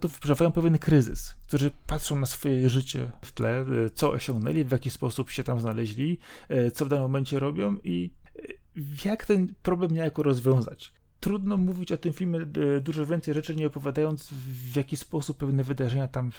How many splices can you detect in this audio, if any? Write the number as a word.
zero